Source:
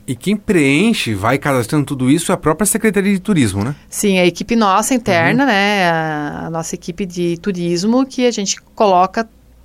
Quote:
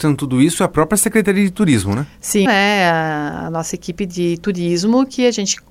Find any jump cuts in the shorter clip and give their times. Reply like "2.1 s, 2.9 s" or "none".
2.5 s

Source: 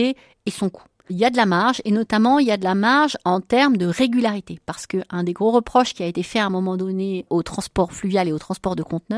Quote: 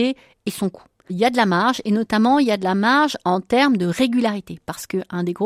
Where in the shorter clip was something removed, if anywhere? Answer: none

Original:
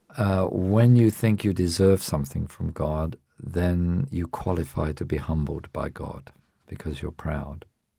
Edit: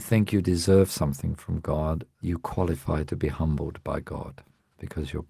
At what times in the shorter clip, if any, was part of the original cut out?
2.2 s

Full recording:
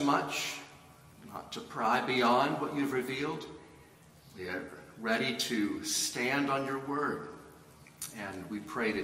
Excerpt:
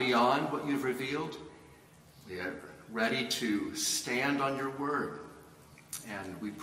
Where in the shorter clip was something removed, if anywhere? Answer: none

